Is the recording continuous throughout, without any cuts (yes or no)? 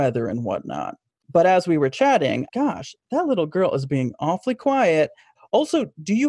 no